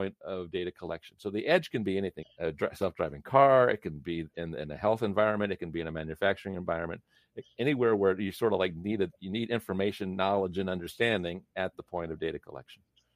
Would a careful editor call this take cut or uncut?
cut